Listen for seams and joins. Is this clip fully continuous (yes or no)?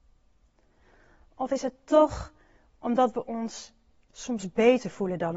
yes